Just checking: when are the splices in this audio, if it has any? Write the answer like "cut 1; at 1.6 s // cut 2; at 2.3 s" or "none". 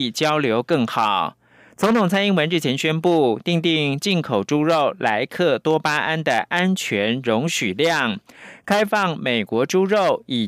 none